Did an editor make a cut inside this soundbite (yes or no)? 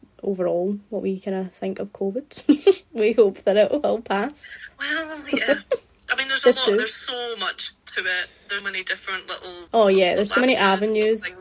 yes